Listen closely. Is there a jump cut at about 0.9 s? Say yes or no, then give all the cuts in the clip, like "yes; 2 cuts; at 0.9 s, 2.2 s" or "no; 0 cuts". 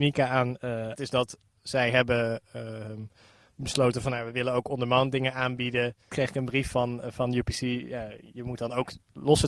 yes; 2 cuts; at 0.9 s, 6.1 s